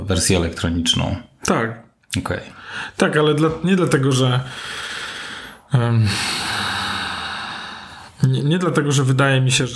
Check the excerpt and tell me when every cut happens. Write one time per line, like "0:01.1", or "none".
none